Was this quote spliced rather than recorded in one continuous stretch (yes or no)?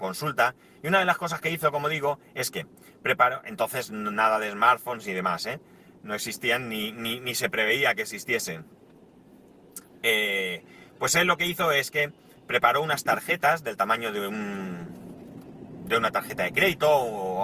no